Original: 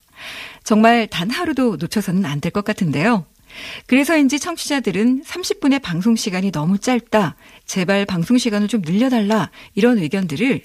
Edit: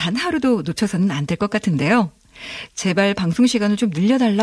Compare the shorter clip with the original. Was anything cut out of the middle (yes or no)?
yes